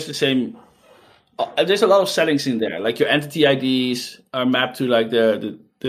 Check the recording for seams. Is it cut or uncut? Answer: uncut